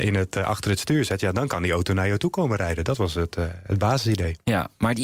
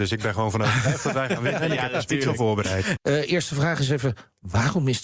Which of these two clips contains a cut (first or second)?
second